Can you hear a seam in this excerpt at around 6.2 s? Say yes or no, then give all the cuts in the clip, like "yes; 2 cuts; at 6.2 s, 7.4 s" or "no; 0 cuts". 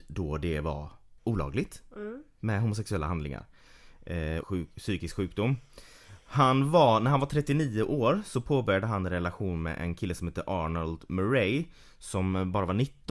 no; 2 cuts; at 1.2 s, 4.4 s